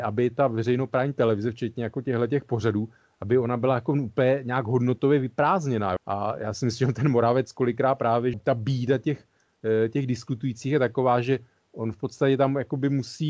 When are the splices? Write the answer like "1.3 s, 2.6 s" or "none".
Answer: 6.0 s, 8.3 s